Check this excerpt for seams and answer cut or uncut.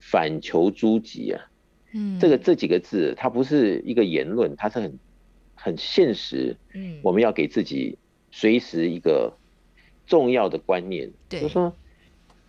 uncut